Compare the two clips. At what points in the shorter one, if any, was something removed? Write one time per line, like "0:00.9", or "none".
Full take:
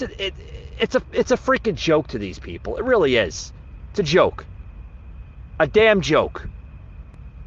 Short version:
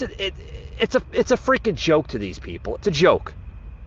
0:02.8